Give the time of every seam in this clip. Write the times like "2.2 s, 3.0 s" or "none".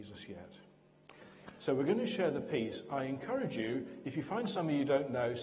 none